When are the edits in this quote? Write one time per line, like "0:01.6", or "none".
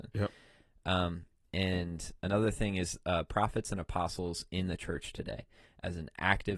none